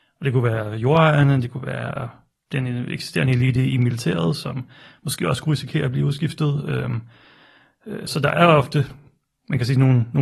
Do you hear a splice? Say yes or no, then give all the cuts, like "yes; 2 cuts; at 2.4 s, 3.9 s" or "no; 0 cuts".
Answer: yes; 1 cut; at 8.1 s